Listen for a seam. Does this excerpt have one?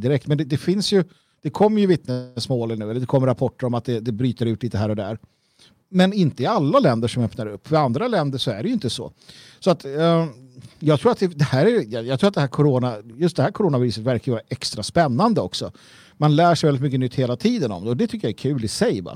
no; 0 cuts

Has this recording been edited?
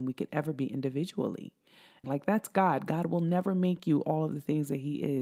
yes; 1 cut; at 2.0 s

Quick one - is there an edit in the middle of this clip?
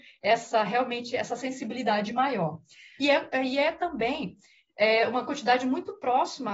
yes; 1 cut; at 3.0 s

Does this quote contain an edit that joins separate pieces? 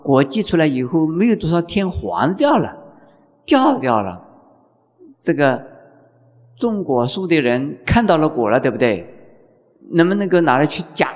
no; 0 cuts

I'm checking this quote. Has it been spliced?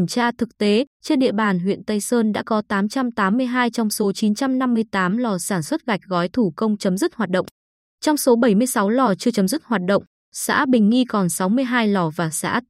yes; 1 cut; at 0.9 s

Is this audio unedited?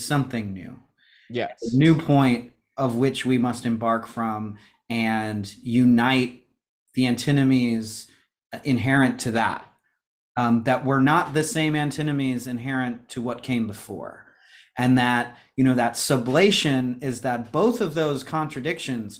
yes; 0 cuts

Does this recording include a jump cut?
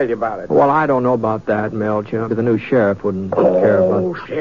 yes; 1 cut; at 2.3 s

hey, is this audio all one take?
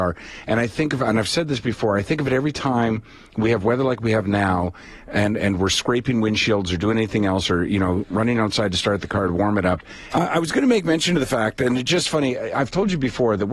no; 1 cut; at 10.1 s

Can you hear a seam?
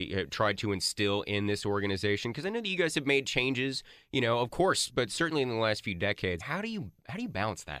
yes; 2 cuts; at 4.9 s, 6.4 s

